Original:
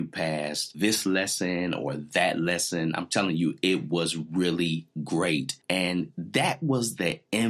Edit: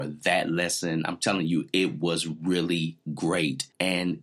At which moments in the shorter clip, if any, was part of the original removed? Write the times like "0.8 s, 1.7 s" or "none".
none